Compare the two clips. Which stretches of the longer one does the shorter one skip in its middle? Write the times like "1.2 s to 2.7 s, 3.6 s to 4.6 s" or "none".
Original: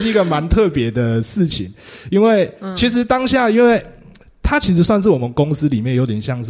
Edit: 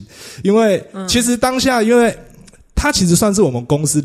none